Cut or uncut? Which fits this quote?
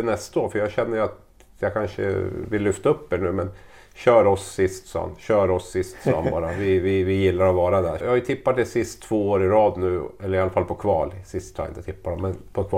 cut